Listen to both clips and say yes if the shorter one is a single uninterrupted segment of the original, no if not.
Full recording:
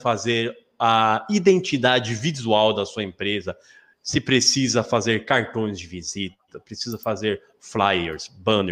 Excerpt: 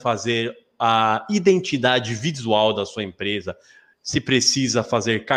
yes